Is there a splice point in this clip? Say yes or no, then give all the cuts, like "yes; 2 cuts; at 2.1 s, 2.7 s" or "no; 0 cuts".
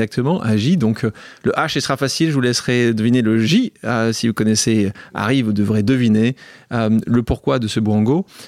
no; 0 cuts